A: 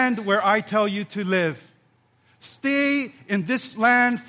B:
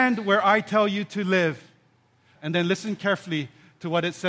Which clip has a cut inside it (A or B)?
B